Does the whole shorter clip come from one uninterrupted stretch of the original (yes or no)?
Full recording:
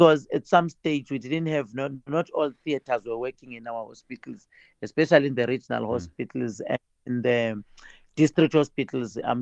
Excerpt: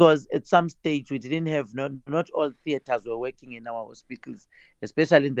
yes